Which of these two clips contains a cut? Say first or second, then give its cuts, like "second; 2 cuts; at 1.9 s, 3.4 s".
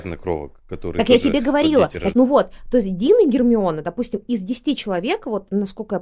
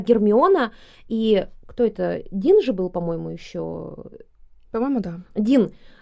first; 1 cut; at 2.1 s